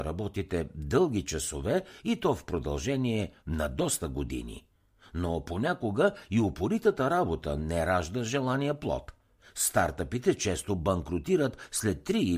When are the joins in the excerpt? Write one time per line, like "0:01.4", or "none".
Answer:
none